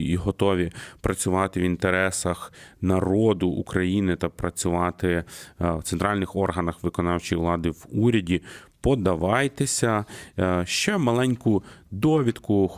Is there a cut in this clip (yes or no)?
no